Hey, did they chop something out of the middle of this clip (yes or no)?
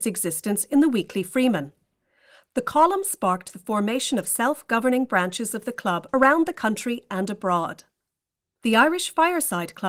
no